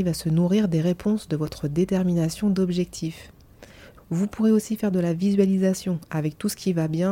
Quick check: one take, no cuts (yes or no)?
no